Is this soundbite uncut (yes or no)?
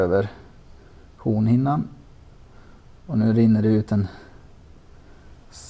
yes